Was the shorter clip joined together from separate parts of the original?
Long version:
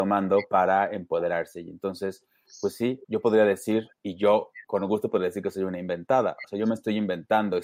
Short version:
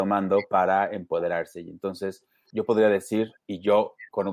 yes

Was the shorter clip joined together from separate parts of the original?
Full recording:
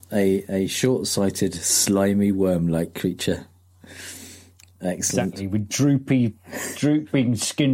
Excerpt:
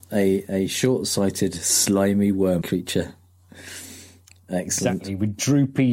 yes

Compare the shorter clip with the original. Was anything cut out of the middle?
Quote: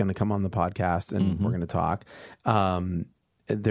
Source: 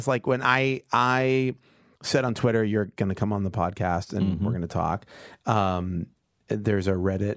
no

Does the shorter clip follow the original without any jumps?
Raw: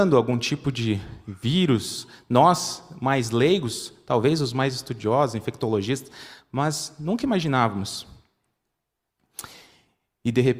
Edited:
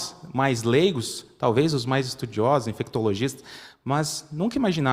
yes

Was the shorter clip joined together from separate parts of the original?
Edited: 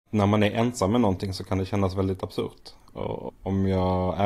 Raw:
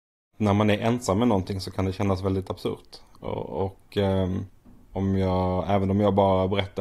yes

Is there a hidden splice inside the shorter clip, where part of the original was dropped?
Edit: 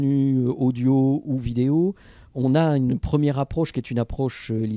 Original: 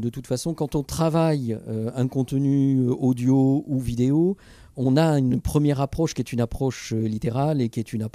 no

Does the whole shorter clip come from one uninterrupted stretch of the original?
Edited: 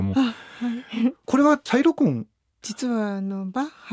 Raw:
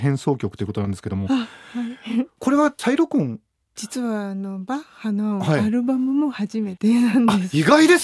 yes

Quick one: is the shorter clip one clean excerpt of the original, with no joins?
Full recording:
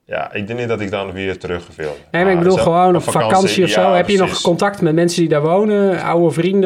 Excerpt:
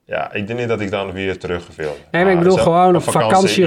yes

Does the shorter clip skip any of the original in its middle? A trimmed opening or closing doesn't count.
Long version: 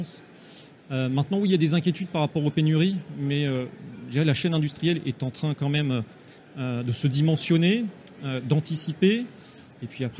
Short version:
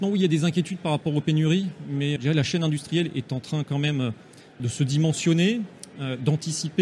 yes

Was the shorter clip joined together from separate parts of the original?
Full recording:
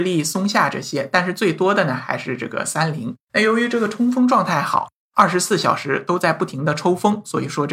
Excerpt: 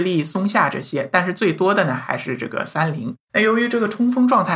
no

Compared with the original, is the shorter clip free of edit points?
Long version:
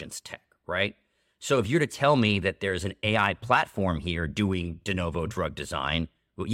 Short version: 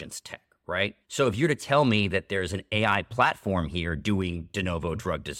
no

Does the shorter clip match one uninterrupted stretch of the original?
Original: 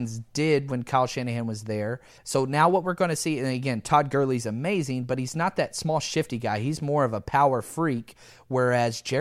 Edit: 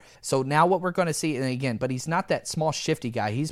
no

